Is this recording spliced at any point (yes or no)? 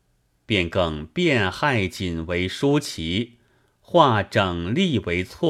no